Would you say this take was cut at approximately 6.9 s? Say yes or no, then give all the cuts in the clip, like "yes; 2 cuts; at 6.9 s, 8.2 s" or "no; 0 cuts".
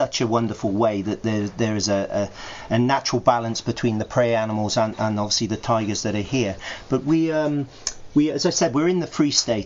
no; 0 cuts